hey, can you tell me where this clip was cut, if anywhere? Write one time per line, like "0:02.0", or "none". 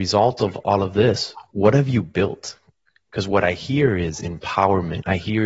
none